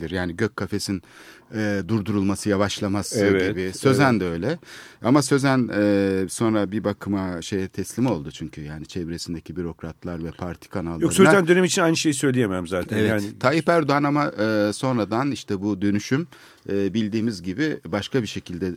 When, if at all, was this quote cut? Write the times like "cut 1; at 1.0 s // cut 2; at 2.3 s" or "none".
none